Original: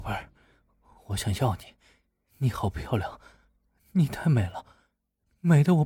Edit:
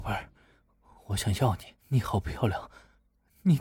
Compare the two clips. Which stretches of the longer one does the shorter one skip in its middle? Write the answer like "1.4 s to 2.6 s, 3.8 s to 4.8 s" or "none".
1.8 s to 2.3 s